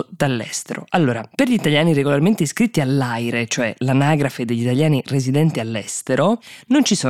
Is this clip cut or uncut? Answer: uncut